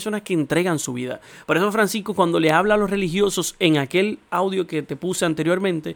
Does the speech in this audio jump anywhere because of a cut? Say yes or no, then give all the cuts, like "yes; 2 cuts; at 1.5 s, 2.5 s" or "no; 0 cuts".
no; 0 cuts